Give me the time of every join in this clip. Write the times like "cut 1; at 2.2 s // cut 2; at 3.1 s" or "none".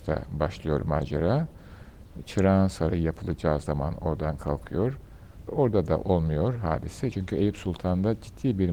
cut 1; at 5.5 s // cut 2; at 7.1 s